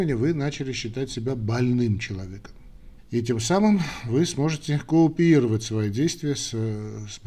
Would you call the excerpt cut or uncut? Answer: cut